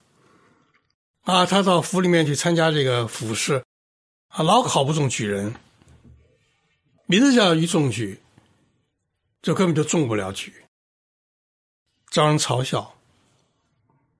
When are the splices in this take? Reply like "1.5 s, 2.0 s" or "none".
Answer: none